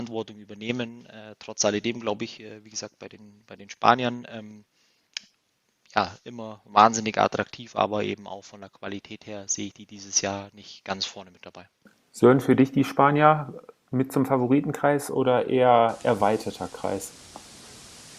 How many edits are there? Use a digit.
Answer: 0